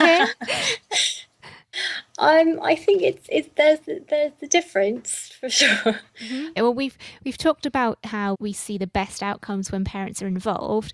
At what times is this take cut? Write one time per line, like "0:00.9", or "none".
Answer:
0:06.6
0:08.3

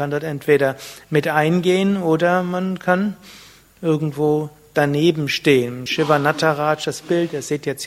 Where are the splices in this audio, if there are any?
none

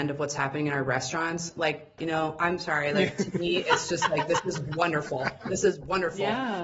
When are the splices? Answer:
0:02.0

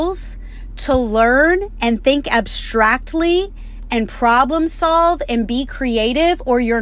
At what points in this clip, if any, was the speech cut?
none

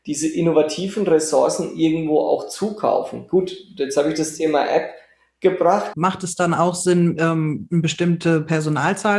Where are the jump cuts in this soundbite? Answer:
0:05.9

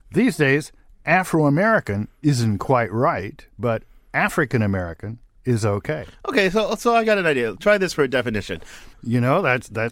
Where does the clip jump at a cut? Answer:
0:08.9

